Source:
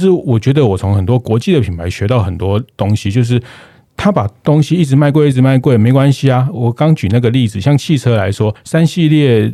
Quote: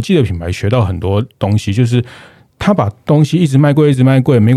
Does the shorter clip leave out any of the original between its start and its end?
no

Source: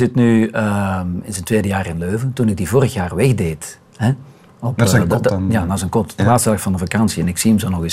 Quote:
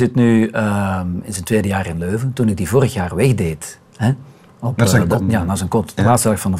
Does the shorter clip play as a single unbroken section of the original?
no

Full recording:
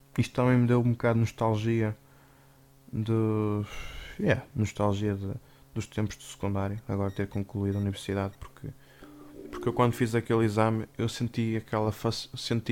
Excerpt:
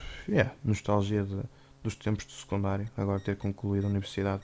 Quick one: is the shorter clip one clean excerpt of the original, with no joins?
yes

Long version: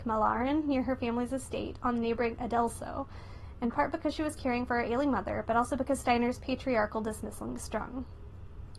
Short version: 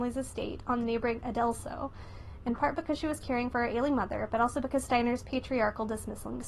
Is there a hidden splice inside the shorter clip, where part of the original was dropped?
no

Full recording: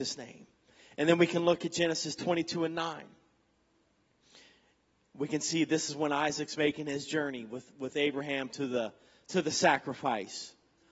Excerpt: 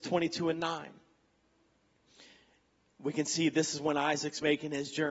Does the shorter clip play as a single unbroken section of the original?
yes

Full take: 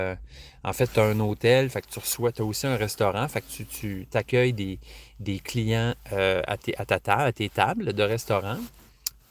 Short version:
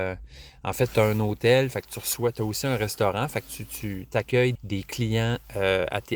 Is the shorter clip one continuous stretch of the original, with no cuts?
no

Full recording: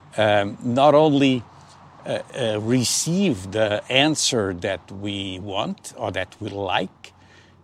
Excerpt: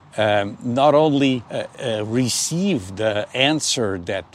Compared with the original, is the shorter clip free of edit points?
no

